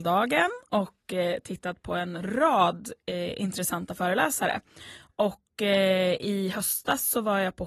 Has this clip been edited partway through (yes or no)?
no